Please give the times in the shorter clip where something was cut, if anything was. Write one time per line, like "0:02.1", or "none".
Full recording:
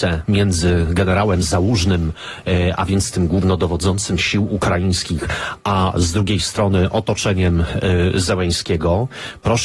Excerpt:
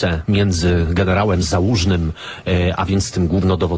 none